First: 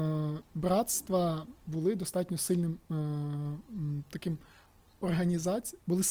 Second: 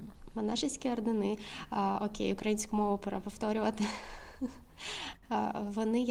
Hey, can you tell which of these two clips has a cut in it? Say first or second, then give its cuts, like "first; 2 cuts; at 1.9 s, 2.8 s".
first; 1 cut; at 1.6 s